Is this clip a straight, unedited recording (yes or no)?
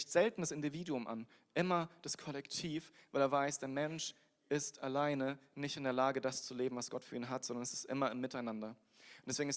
yes